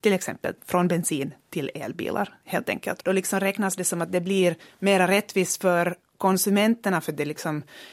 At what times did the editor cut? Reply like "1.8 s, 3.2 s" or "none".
3.0 s